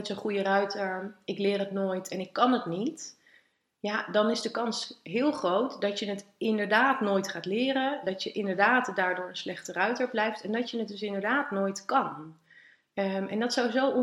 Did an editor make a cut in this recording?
no; 0 cuts

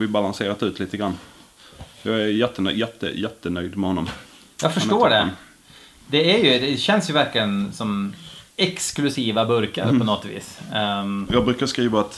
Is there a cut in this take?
yes; 2 cuts; at 8.5 s, 11.3 s

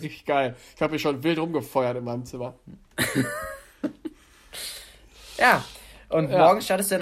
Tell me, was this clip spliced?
no; 0 cuts

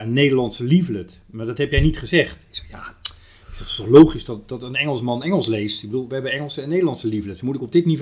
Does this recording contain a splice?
no; 0 cuts

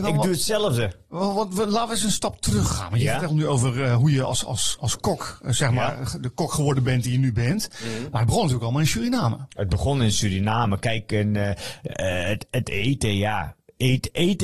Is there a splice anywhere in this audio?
no; 0 cuts

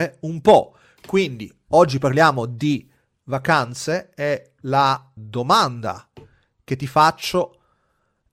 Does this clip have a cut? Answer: yes; 1 cut; at 5.2 s

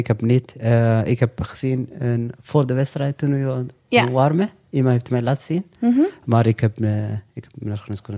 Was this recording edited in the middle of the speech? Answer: no; 0 cuts

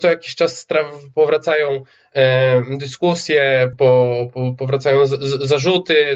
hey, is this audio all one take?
no; 1 cut; at 3.7 s

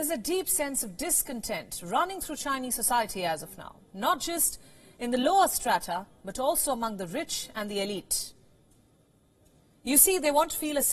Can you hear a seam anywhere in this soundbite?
no; 0 cuts

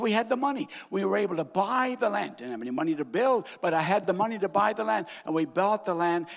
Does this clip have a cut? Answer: no; 0 cuts

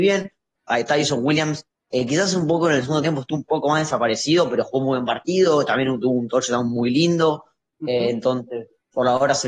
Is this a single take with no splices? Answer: yes; 0 cuts

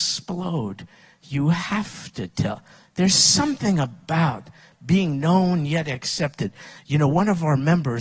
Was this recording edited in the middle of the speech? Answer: no; 0 cuts

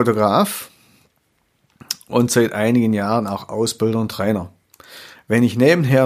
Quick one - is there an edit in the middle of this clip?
no; 0 cuts

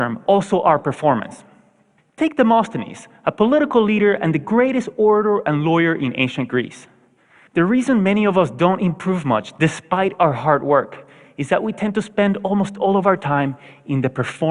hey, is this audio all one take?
no; 2 cuts; at 2.0 s, 7.5 s

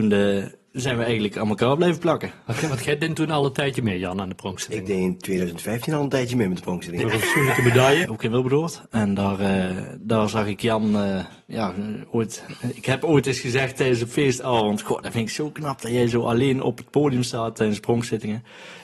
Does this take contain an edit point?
yes; 2 cuts; at 7.0 s, 8.0 s

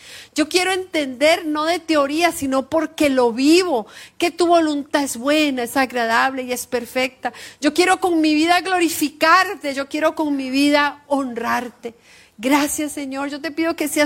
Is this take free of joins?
yes; 0 cuts

